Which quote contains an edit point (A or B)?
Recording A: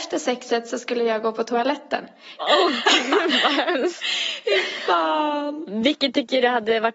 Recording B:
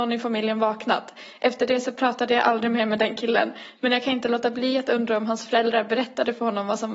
A